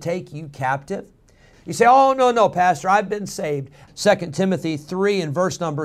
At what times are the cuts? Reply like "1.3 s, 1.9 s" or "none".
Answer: 1.5 s, 3.9 s